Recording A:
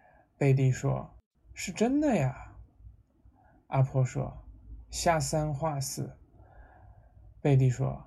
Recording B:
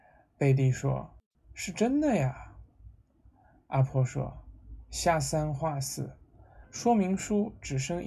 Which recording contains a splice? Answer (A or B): B